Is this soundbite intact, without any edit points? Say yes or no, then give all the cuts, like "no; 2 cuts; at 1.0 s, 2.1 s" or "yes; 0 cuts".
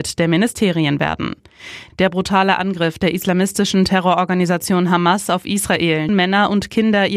no; 2 cuts; at 1.9 s, 6.1 s